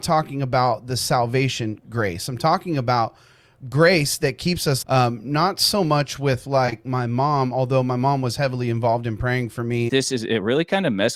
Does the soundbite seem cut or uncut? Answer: cut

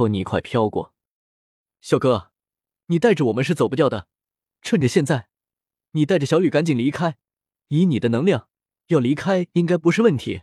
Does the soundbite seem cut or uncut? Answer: uncut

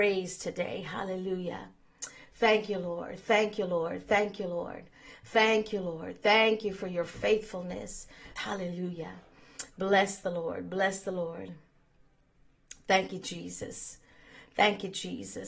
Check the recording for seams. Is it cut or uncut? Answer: cut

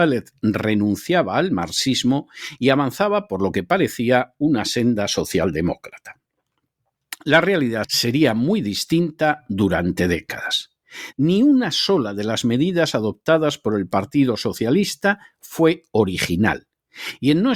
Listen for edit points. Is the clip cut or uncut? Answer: cut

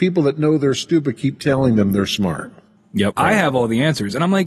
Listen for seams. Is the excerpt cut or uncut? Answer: cut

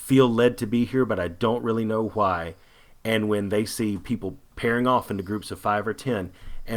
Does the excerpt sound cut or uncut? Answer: uncut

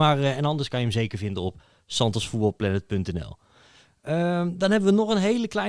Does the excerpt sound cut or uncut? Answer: uncut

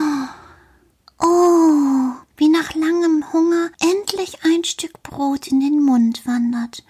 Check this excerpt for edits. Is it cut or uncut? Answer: cut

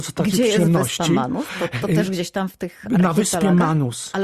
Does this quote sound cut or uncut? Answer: uncut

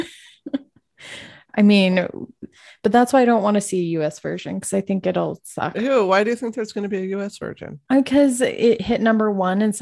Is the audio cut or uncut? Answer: uncut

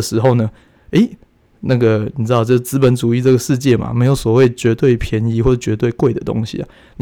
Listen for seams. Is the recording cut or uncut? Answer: uncut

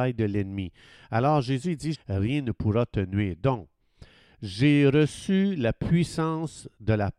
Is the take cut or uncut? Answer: cut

